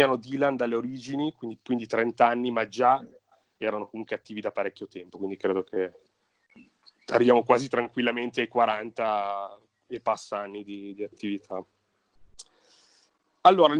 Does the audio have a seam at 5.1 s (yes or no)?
no